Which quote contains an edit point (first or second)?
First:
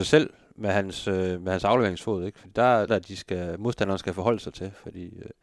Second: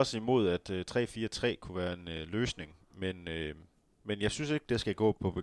first